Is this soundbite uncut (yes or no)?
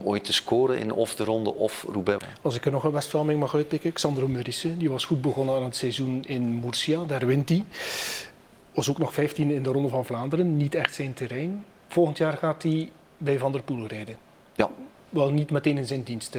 no